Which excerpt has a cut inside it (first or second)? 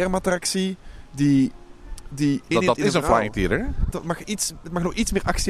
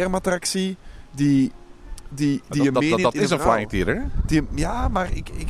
first